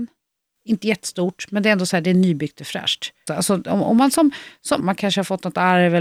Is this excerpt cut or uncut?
cut